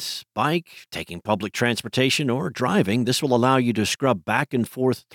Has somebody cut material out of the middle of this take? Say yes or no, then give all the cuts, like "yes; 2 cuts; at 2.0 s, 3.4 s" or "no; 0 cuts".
no; 0 cuts